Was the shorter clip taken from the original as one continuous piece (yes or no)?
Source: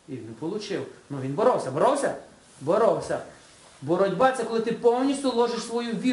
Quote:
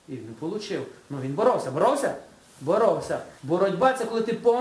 no